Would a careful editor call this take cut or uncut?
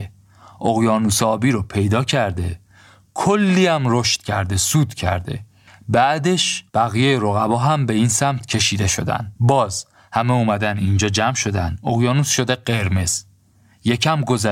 cut